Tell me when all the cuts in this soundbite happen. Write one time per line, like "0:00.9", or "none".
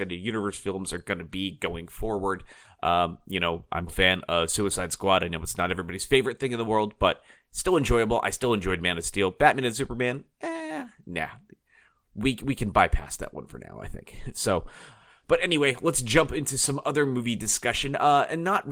0:03.9